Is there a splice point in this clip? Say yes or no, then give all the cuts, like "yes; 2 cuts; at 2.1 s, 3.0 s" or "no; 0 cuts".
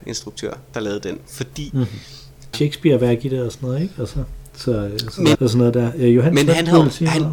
yes; 2 cuts; at 2.5 s, 5.3 s